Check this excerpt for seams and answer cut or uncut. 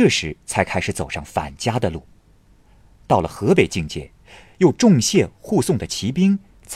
uncut